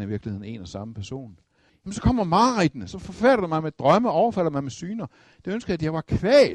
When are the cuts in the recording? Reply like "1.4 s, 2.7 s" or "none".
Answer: 1.7 s